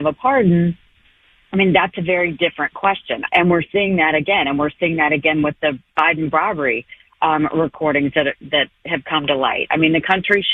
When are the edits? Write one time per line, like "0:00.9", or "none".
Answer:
0:03.3